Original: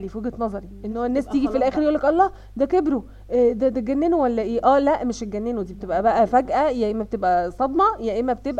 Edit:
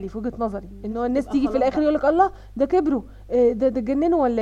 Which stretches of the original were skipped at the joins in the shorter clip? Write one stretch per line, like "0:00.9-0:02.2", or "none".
none